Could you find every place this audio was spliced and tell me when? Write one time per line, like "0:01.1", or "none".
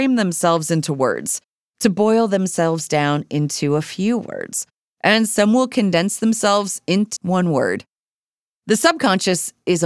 0:07.2